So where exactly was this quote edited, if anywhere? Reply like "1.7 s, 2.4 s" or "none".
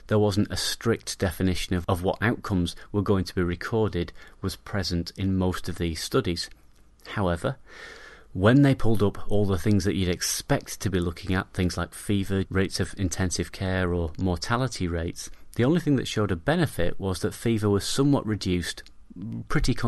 12.4 s